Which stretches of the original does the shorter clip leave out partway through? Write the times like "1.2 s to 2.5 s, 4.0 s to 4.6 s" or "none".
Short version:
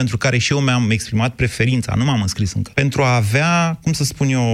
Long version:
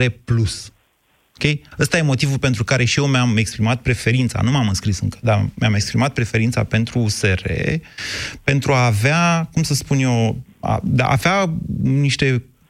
5.2 s to 8.4 s